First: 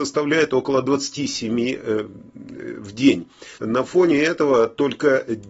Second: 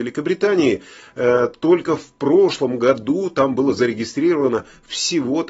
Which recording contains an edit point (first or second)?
first